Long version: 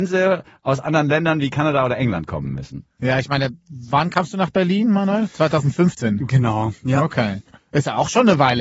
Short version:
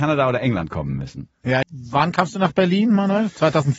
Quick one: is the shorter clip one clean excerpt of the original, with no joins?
no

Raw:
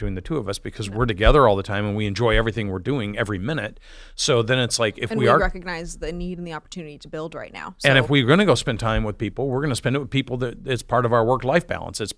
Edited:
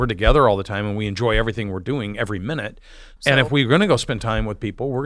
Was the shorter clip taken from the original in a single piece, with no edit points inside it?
no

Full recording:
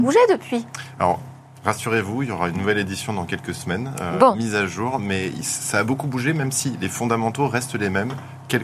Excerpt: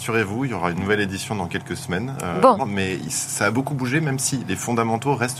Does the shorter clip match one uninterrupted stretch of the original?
no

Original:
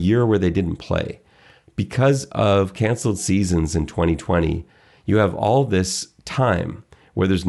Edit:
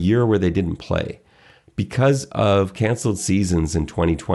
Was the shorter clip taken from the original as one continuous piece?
yes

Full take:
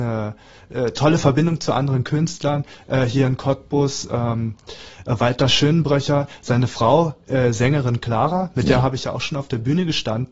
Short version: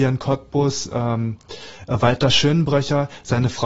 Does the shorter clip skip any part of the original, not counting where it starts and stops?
no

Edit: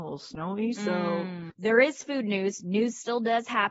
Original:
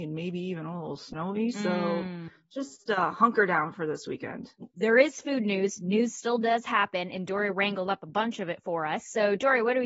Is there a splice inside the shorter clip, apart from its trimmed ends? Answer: yes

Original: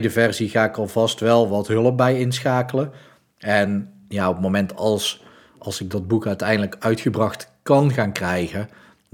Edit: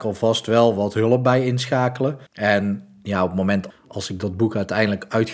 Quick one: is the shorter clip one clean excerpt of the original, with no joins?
no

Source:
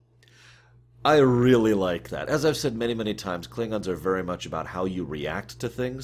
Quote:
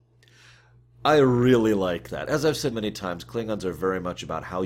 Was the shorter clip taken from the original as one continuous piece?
no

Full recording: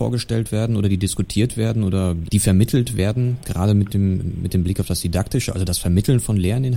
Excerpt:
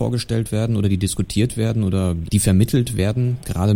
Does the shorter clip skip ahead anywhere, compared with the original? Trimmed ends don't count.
no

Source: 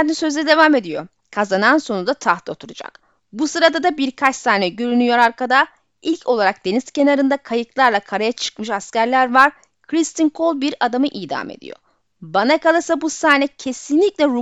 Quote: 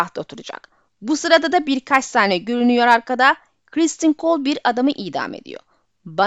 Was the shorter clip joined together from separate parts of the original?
yes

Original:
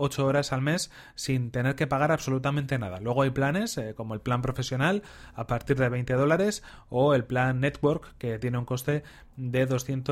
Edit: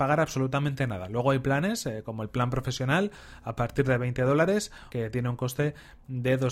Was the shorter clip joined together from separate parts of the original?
yes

